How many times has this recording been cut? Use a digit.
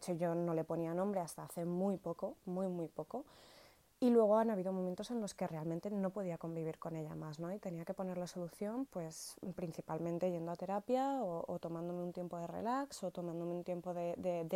1